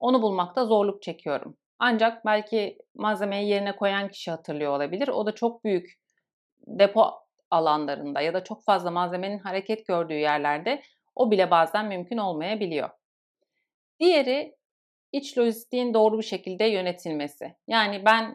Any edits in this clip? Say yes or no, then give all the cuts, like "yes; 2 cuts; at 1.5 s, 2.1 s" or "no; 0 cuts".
no; 0 cuts